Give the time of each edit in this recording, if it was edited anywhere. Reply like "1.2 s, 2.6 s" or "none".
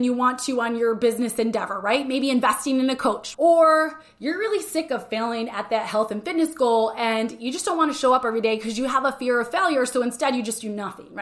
3.3 s